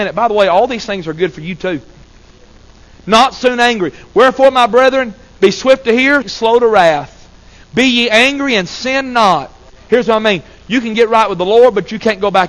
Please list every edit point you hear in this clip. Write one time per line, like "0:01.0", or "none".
0:06.2
0:09.7